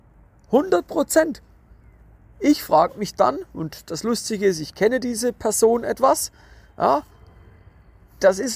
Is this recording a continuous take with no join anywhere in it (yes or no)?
yes